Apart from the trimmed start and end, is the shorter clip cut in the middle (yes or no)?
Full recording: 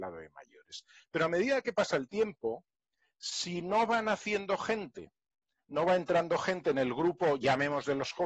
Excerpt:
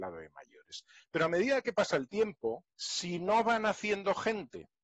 yes